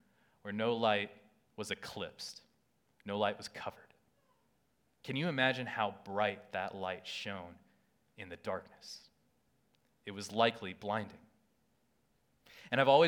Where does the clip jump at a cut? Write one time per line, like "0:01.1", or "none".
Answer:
none